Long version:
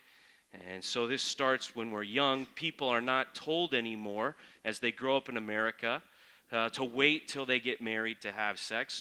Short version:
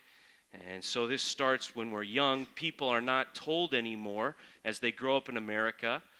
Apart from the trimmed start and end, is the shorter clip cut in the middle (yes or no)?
no